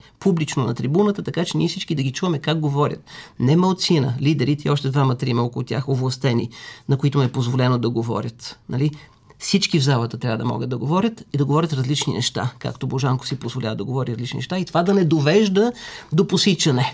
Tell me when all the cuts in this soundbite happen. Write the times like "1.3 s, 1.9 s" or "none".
none